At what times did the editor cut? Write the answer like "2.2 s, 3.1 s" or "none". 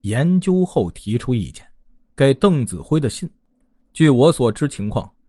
2.1 s

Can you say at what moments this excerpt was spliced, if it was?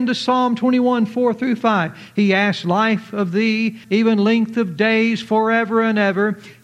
3.8 s

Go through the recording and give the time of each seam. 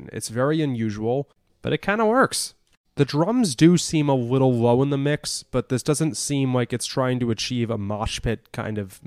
none

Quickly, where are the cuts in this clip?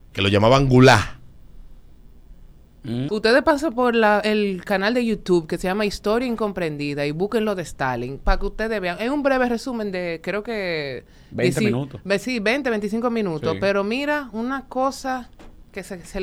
3.1 s

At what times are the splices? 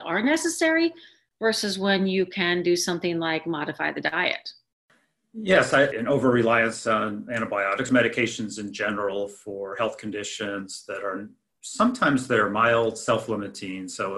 5.9 s, 7.9 s

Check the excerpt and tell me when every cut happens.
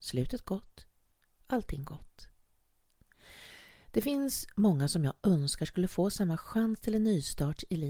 none

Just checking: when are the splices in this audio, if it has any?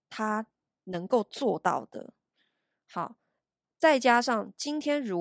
none

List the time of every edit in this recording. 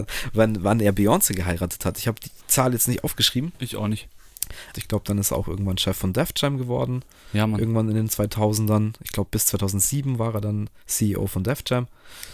4.7 s

